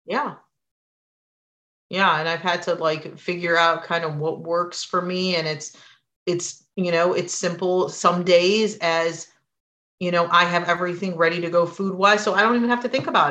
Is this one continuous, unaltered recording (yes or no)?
yes